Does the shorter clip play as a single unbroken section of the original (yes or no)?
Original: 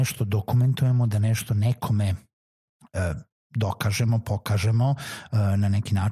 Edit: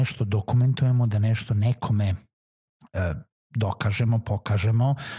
yes